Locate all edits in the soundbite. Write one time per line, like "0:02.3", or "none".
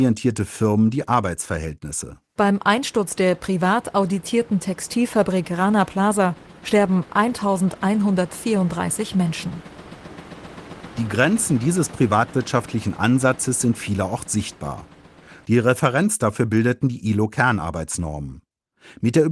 0:02.4
0:15.4